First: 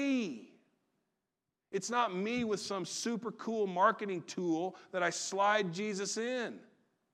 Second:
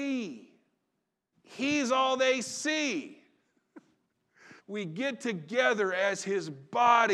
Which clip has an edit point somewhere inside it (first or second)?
second